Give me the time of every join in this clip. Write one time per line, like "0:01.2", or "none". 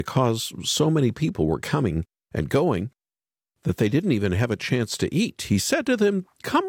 none